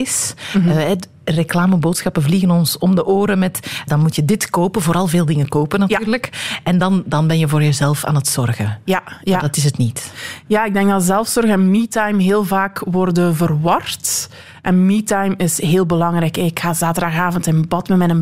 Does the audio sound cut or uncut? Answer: cut